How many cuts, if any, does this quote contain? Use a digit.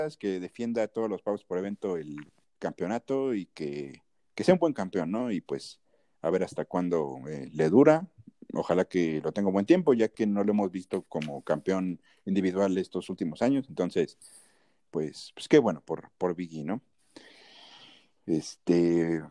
0